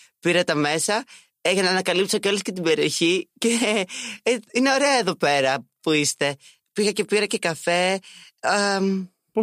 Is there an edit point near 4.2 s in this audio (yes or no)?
no